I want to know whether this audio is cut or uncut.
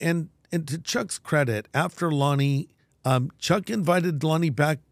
cut